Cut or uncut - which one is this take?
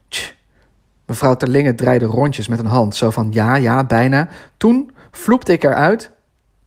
uncut